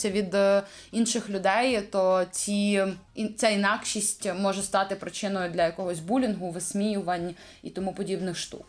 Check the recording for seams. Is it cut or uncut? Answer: cut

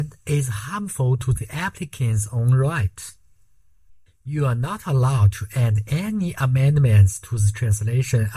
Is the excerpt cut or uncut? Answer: uncut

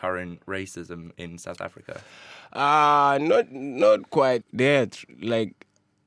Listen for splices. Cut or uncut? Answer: cut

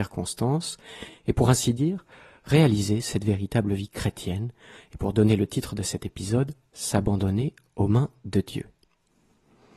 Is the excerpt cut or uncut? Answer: uncut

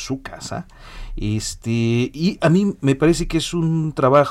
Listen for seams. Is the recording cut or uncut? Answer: uncut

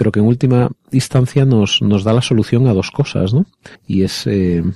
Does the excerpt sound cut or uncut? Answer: cut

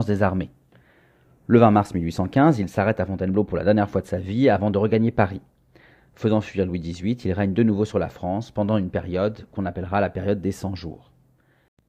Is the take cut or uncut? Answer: uncut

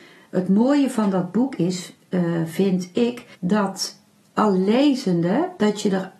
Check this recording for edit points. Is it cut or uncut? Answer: cut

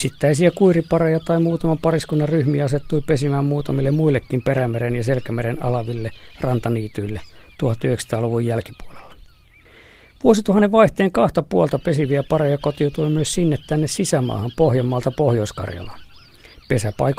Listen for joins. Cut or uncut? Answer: uncut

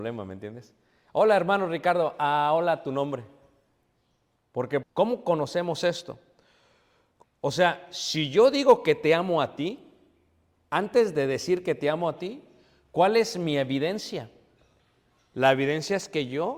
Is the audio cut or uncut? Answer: cut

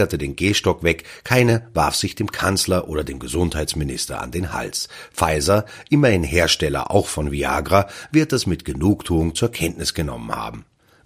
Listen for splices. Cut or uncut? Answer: uncut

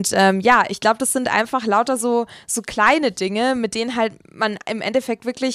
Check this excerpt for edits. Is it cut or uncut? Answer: uncut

